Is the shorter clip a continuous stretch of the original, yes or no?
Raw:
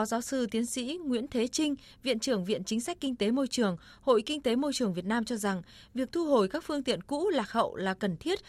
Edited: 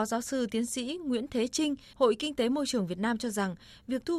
no